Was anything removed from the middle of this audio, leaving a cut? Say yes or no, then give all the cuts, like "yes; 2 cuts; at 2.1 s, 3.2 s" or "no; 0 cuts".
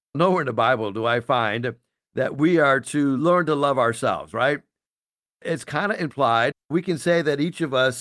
yes; 1 cut; at 6.5 s